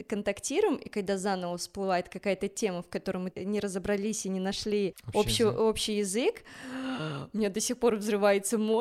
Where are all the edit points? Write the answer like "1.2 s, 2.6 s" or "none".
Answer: none